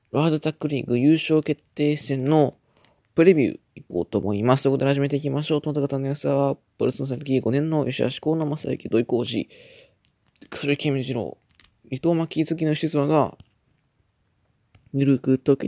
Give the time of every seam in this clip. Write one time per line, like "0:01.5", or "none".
none